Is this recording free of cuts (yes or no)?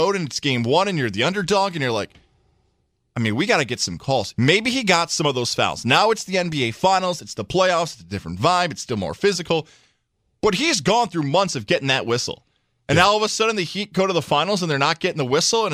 no